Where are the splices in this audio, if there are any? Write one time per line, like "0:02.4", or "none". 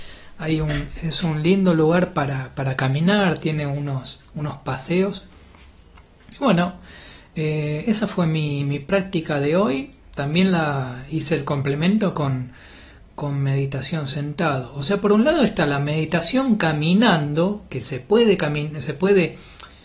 none